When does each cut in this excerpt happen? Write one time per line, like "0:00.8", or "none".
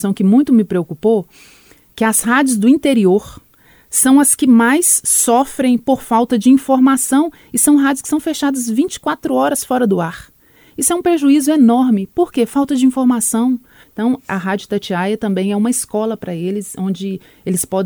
0:13.8